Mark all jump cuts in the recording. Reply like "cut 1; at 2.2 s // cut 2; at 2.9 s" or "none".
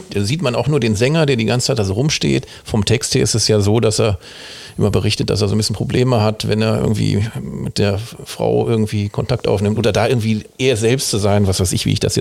cut 1; at 9.8 s